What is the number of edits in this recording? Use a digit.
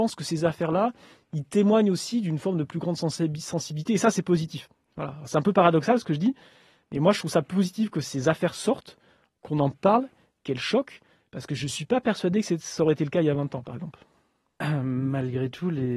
0